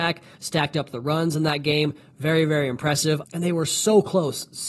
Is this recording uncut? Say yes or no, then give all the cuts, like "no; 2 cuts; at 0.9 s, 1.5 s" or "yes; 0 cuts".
no; 1 cut; at 3.2 s